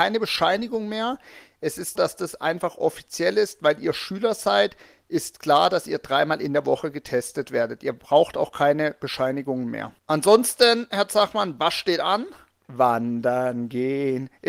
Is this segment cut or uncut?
cut